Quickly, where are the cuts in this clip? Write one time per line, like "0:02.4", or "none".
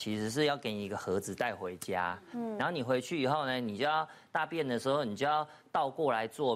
none